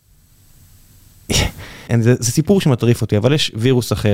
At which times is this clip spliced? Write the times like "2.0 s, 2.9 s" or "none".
1.9 s